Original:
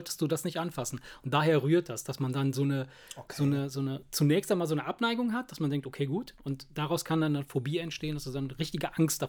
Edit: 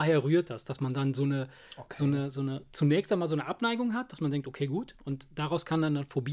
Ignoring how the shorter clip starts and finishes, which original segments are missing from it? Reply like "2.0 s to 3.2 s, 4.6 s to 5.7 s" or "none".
none